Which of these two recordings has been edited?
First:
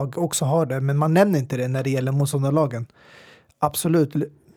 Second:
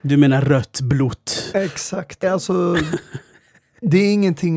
second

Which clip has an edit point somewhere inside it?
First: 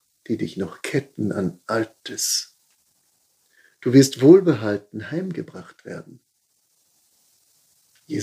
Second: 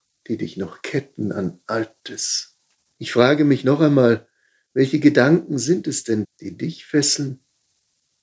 second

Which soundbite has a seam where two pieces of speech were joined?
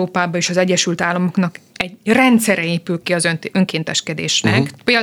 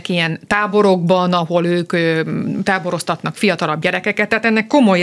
first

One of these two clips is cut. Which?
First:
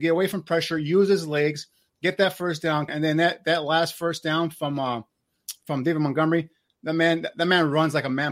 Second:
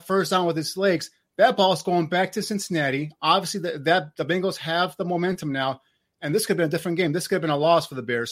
first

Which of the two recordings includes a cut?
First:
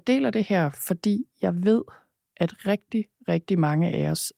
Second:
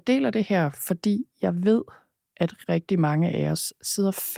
second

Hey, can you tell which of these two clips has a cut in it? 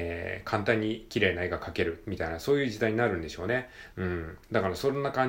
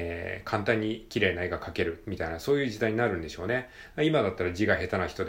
first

